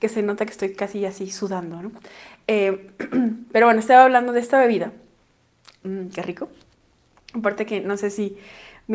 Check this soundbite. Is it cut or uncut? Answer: cut